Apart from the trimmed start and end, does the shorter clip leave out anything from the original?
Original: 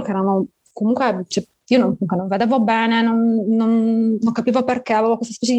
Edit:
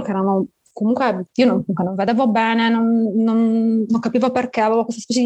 yes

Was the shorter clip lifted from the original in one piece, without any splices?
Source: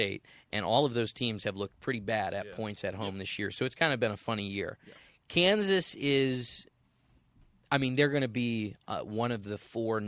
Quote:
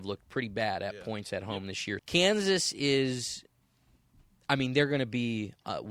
no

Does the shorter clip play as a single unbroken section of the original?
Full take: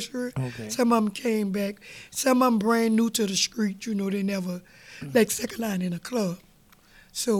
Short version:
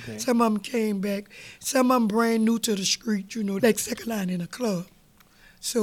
no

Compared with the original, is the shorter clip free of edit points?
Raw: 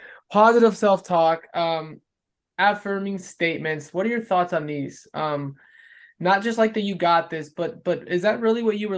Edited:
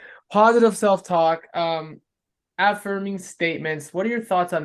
yes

